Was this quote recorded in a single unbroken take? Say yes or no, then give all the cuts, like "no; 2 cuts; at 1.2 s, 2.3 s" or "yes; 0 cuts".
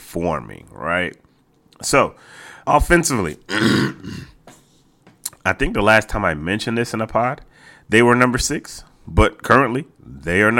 no; 1 cut; at 2.6 s